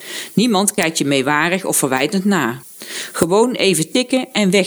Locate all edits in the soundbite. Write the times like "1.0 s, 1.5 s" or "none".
none